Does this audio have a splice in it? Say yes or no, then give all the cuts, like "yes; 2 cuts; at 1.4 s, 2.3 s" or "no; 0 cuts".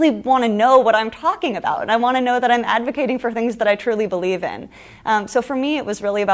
no; 0 cuts